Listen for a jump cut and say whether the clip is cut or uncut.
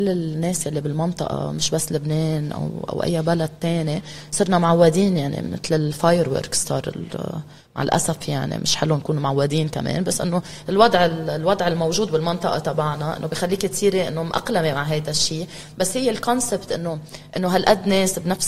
uncut